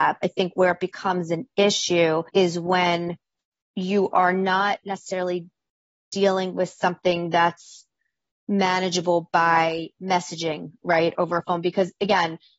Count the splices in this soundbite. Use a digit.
2